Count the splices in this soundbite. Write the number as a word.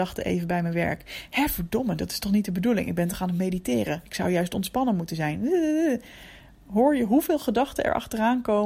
one